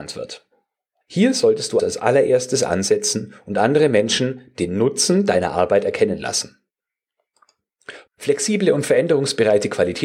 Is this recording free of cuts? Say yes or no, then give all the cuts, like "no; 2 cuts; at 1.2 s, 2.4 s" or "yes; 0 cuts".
no; 2 cuts; at 1.8 s, 8.1 s